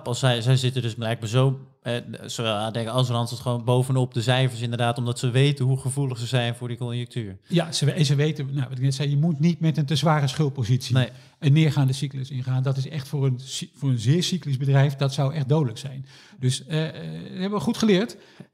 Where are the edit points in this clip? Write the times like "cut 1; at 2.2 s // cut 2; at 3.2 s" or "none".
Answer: none